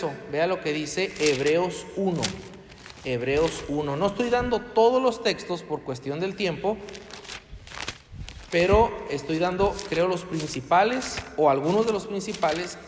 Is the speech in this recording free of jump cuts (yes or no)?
yes